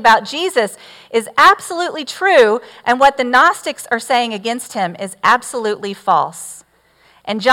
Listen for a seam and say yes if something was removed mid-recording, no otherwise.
no